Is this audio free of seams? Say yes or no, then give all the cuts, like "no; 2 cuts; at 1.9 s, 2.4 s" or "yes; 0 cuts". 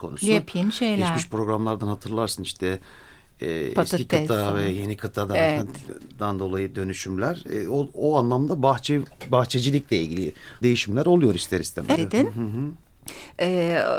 no; 2 cuts; at 10.6 s, 12.0 s